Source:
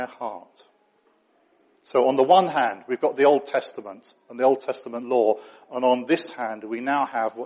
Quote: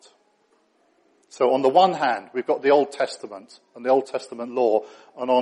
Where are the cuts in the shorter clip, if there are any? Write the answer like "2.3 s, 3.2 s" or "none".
none